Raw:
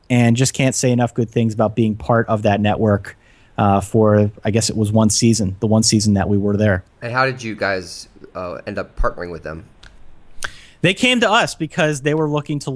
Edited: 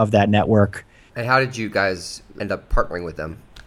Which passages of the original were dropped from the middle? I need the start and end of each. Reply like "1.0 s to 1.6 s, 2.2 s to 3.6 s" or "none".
3.4 s to 6.9 s, 8.2 s to 8.6 s

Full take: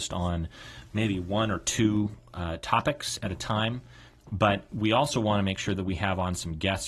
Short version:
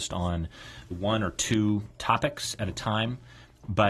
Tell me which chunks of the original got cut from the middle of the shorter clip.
0.9 s to 1.2 s, 2.3 s to 2.6 s

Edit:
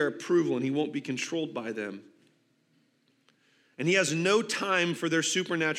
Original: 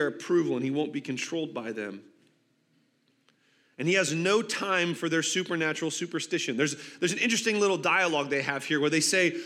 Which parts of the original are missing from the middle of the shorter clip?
none

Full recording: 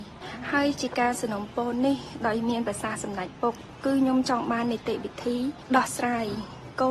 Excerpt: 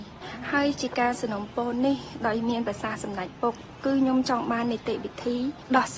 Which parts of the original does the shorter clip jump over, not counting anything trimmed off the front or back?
none

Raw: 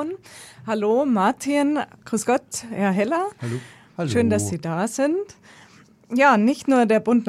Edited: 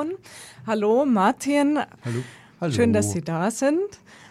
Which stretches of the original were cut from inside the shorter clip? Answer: 2.0 s to 3.3 s

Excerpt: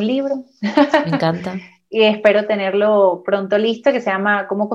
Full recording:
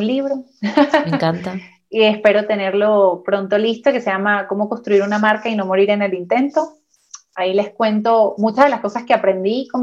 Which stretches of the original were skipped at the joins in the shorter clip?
none

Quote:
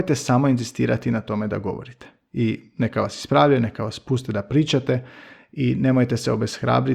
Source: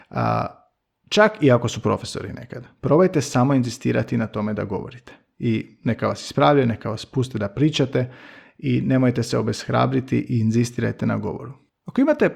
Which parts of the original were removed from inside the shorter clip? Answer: none

